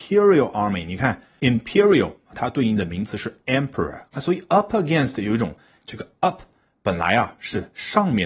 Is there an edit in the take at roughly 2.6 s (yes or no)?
no